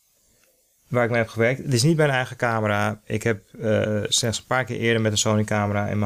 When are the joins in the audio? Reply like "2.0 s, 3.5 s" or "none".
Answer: 4.1 s

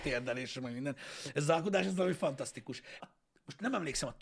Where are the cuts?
3.0 s

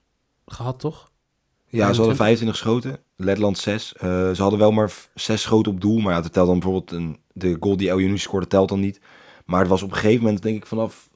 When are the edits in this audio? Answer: none

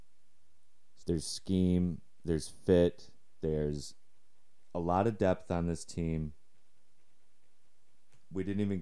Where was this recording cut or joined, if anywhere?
1.0 s

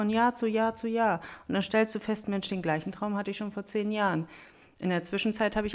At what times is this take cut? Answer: none

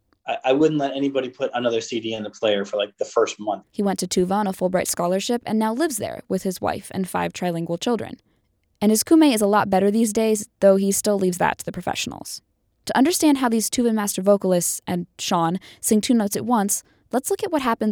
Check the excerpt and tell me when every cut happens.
3.6 s

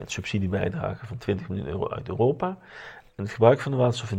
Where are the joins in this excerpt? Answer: 3.1 s

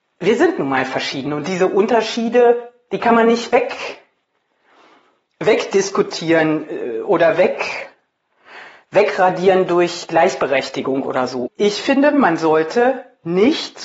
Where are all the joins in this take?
11.5 s

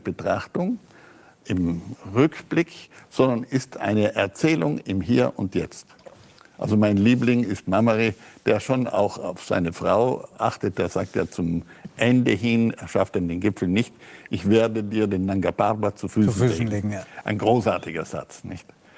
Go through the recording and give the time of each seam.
none

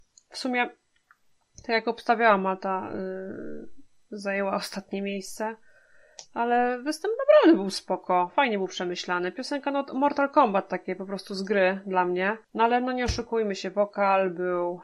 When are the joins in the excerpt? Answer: 12.4 s

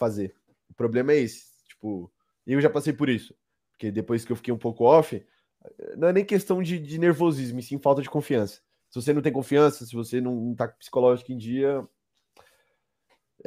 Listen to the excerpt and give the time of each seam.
8.8 s

